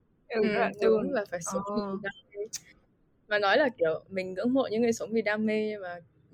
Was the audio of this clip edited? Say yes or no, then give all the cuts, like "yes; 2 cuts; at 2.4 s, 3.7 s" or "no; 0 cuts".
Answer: no; 0 cuts